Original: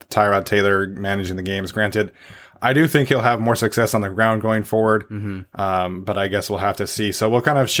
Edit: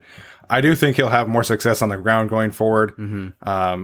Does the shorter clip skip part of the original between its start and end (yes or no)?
no